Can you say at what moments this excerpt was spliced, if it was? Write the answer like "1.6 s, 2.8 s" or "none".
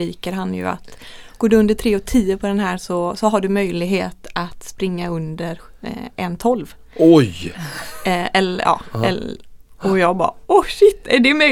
none